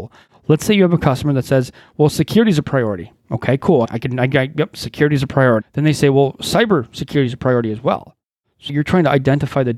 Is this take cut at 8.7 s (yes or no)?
yes